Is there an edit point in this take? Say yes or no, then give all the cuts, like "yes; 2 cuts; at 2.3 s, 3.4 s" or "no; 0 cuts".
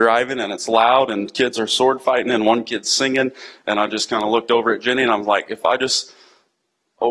no; 0 cuts